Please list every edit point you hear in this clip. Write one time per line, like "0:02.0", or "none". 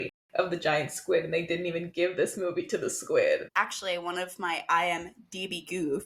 0:03.5